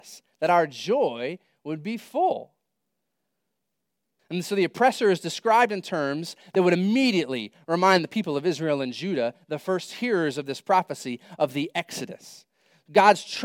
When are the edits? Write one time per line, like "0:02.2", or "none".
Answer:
0:04.2